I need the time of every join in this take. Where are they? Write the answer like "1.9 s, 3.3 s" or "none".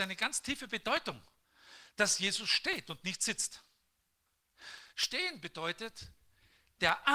4.9 s